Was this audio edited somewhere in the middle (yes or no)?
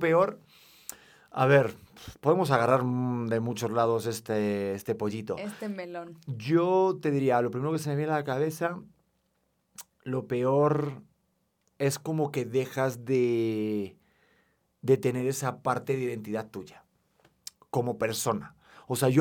no